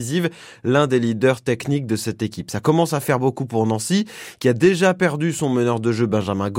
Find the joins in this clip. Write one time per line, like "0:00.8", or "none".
none